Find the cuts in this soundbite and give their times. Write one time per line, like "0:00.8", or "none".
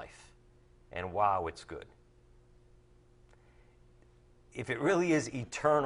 none